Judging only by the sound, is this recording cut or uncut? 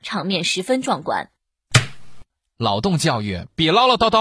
uncut